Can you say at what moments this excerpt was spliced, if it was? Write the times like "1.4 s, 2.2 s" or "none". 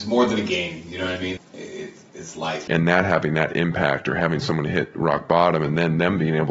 1.4 s, 2.7 s